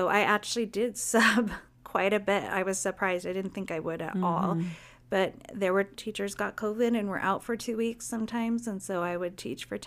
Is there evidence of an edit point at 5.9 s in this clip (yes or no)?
yes